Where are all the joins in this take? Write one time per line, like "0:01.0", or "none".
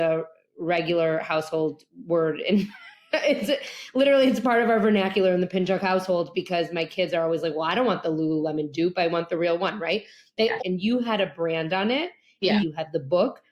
0:10.6
0:12.6